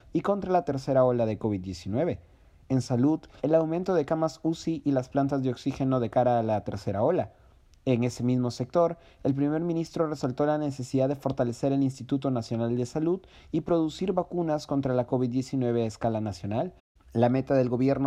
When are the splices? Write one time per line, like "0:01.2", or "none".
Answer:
0:03.4